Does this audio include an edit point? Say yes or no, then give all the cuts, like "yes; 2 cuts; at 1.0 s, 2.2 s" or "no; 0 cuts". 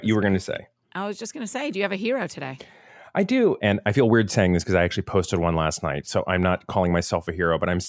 yes; 1 cut; at 3.6 s